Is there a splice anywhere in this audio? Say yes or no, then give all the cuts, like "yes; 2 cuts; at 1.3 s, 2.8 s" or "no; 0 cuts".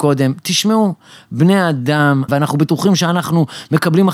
yes; 1 cut; at 2.3 s